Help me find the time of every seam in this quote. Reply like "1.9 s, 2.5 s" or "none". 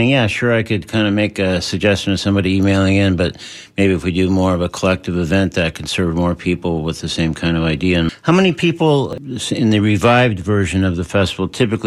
none

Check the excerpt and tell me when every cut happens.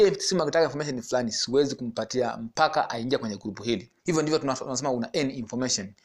4.0 s

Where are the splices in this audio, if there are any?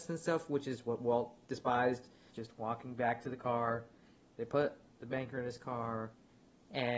2.3 s

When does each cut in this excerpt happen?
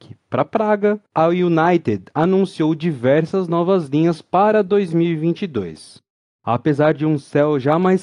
6.4 s

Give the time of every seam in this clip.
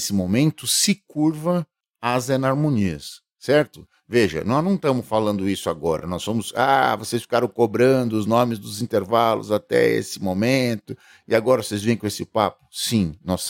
none

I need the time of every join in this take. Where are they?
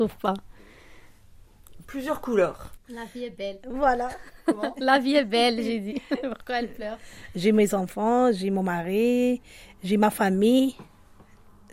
2.8 s

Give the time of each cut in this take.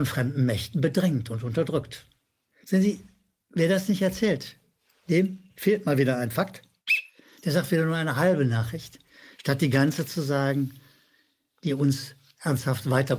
none

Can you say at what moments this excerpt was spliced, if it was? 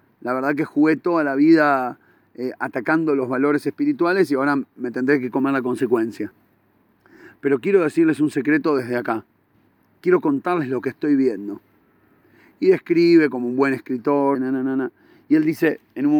14.3 s

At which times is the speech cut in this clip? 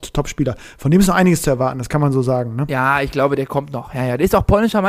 none

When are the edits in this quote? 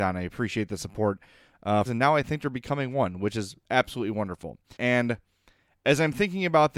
1.9 s, 4.8 s

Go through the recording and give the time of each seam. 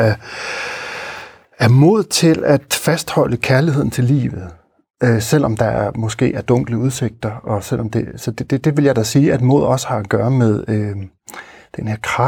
none

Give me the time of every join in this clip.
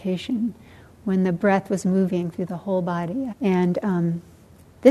3.3 s

